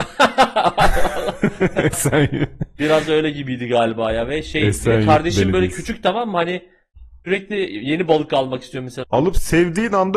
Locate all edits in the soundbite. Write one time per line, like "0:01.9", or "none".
0:01.9
0:09.0